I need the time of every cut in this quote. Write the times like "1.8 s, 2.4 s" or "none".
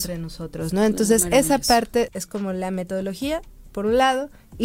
2.1 s